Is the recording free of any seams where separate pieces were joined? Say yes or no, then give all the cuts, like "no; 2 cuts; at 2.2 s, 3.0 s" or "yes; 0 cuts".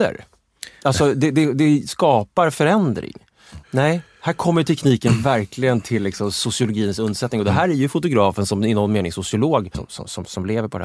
no; 2 cuts; at 3.6 s, 9.7 s